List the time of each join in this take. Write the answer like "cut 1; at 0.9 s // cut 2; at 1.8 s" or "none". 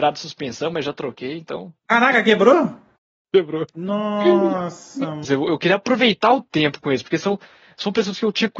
cut 1; at 5.2 s